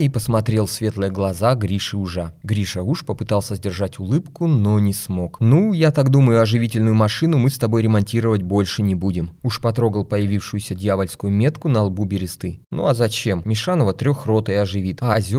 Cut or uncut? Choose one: cut